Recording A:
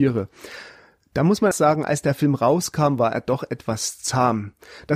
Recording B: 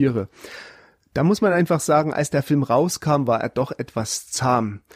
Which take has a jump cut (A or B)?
A